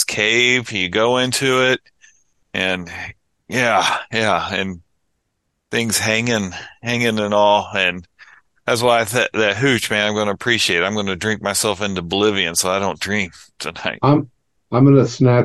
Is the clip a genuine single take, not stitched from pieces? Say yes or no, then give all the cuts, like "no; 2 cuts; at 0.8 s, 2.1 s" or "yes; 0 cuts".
yes; 0 cuts